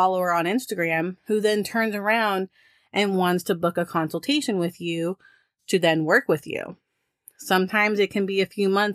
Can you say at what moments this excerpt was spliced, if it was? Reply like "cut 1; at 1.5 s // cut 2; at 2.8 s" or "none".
none